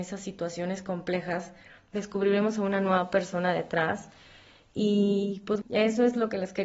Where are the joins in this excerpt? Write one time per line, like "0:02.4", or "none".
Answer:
0:05.6